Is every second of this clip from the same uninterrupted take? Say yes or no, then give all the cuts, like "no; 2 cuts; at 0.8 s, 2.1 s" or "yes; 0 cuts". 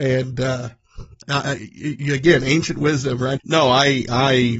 no; 2 cuts; at 1.2 s, 3.4 s